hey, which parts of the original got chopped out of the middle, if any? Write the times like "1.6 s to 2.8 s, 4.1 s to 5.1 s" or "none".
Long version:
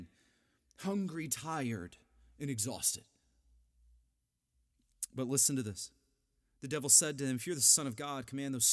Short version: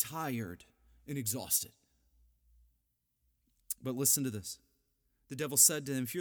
none